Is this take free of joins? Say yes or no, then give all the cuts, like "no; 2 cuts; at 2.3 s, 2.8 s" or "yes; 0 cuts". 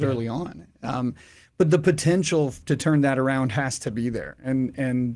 yes; 0 cuts